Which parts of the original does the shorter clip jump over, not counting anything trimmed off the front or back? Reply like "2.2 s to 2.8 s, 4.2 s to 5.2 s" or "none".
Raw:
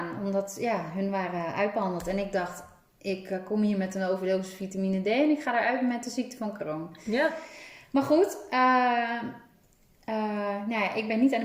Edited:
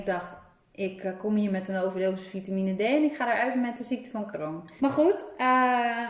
7.0 s to 7.9 s